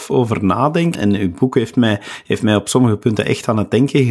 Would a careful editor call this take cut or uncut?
cut